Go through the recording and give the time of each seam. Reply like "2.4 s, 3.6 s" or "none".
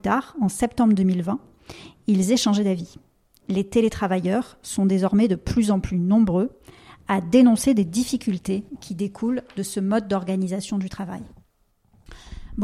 none